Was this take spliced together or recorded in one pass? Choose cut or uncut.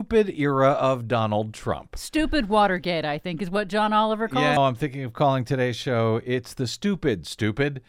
cut